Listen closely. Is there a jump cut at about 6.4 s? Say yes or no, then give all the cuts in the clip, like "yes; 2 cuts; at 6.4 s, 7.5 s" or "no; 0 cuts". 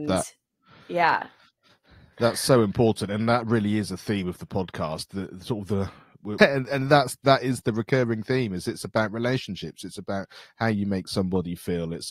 yes; 1 cut; at 6.4 s